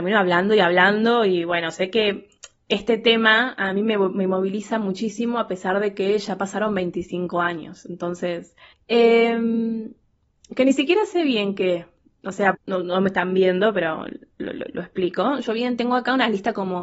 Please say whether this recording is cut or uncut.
cut